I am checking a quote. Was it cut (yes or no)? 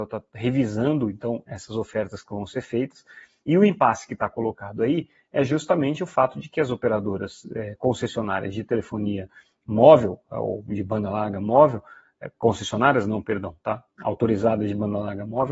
no